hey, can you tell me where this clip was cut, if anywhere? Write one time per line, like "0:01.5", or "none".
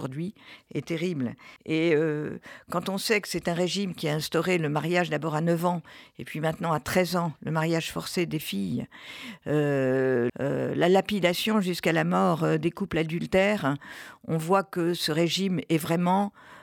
0:01.6
0:10.3